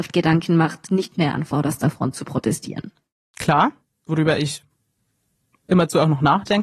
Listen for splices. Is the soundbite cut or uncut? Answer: cut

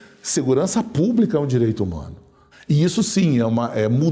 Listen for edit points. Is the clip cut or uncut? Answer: cut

